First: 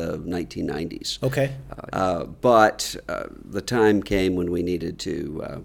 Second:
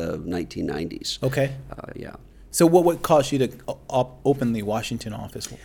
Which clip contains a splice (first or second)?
first